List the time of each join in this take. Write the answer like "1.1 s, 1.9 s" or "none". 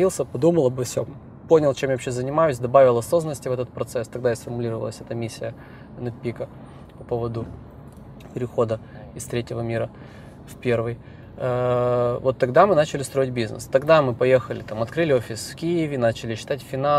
none